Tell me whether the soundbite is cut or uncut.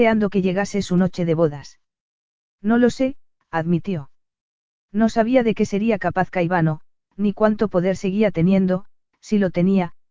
uncut